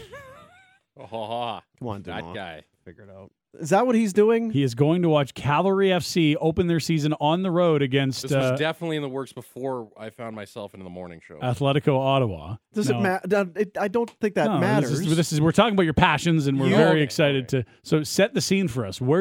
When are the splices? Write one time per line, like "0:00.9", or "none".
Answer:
0:03.5